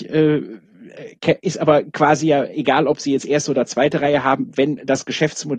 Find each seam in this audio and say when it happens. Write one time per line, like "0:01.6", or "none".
none